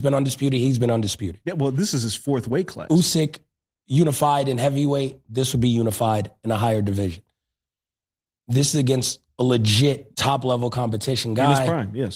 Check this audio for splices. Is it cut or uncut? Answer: cut